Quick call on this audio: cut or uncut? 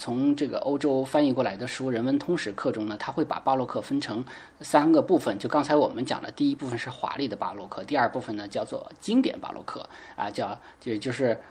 uncut